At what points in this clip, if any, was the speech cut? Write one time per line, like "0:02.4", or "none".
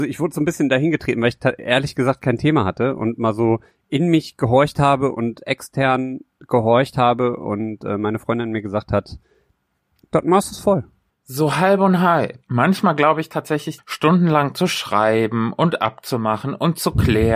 0:11.1
0:12.4
0:13.8